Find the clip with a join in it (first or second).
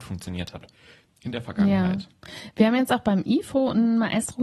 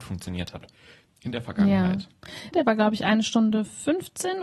second